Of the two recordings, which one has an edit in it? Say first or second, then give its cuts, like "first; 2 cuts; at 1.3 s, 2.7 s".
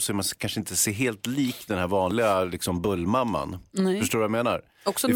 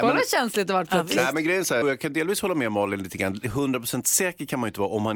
second; 1 cut; at 1.8 s